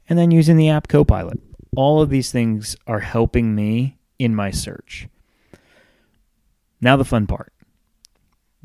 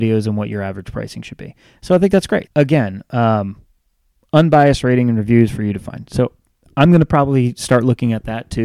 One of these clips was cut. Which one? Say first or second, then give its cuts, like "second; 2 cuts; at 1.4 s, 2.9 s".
second; 1 cut; at 2.5 s